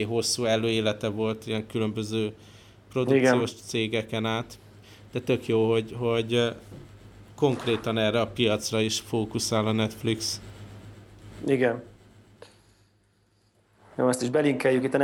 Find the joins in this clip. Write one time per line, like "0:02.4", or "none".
none